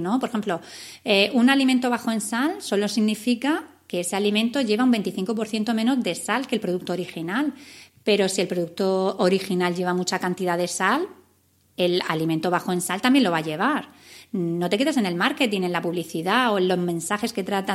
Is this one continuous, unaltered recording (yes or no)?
yes